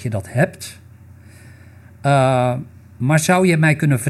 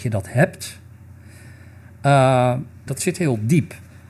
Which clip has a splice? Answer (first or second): second